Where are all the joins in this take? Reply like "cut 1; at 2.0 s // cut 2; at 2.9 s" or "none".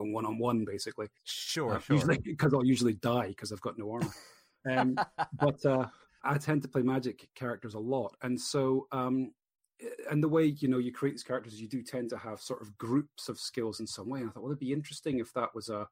cut 1; at 6.2 s